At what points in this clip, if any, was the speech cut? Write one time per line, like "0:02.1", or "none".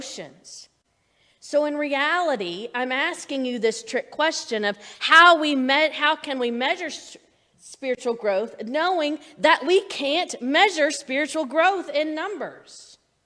none